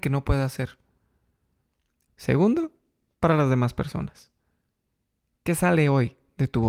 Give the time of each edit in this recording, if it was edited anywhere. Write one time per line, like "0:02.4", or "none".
0:02.1